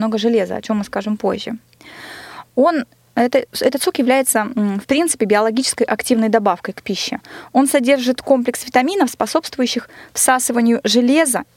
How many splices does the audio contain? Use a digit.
0